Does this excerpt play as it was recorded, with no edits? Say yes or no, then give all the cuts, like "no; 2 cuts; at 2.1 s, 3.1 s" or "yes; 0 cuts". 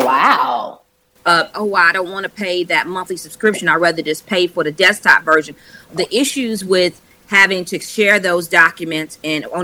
no; 2 cuts; at 1.5 s, 5.9 s